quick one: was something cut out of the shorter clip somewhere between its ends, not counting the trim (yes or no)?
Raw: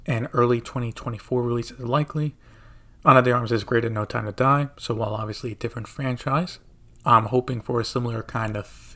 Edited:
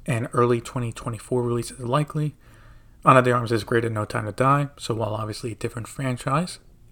no